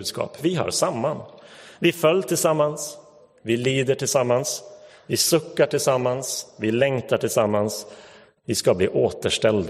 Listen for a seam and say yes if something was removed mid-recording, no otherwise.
no